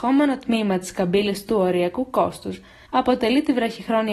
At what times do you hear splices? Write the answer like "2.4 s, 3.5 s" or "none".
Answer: 2.9 s